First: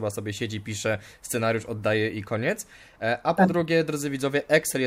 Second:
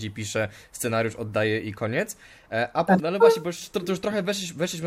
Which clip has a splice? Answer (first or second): second